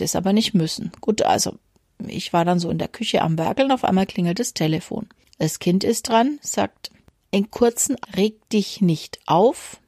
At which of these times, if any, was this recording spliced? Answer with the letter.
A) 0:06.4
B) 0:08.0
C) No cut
B